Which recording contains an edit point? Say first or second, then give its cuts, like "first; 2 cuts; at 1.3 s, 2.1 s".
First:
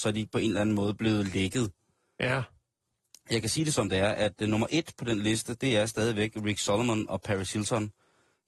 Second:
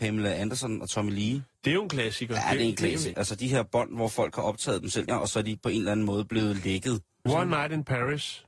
second; 3 cuts; at 3.1 s, 5.1 s, 7.3 s